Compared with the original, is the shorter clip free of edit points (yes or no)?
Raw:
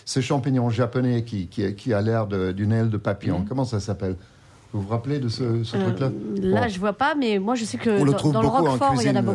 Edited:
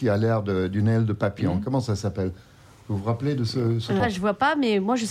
no